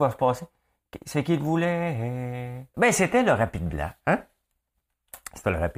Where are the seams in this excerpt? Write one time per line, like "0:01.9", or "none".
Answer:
0:02.7